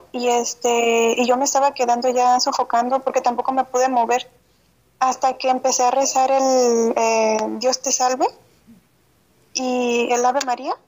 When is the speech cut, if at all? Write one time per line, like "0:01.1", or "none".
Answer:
none